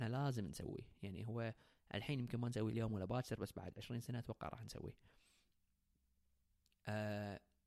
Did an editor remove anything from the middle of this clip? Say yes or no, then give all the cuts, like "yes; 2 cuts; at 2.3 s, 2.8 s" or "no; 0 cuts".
no; 0 cuts